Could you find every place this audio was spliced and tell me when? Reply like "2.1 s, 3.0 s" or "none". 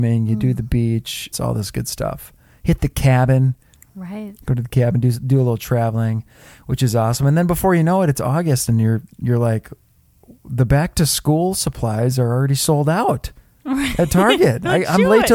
1.3 s